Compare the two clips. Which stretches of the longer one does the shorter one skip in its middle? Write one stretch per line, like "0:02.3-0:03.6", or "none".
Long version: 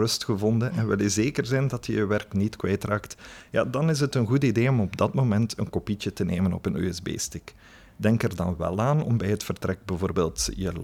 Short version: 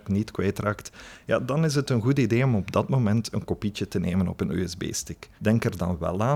0:07.6-0:07.9